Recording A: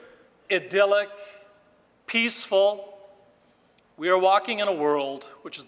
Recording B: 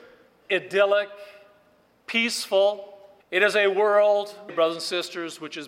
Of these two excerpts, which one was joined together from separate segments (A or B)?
B